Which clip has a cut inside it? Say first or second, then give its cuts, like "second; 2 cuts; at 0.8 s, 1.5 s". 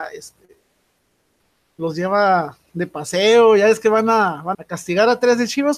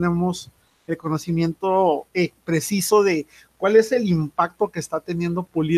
first; 1 cut; at 4.5 s